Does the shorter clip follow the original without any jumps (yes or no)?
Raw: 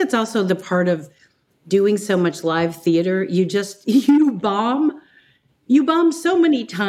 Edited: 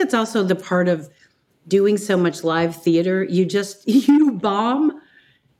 yes